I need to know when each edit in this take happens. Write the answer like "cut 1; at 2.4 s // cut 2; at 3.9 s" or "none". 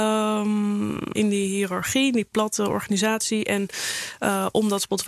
cut 1; at 1.1 s